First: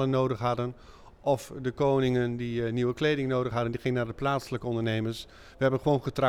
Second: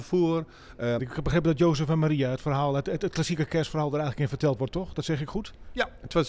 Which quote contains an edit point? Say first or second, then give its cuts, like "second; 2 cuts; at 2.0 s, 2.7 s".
second; 1 cut; at 1.0 s